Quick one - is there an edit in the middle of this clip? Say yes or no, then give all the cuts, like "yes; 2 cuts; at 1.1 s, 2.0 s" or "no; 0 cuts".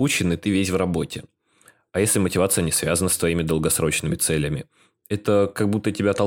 no; 0 cuts